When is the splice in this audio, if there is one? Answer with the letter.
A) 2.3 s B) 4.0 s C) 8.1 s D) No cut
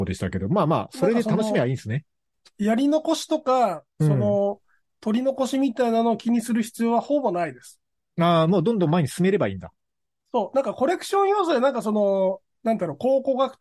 D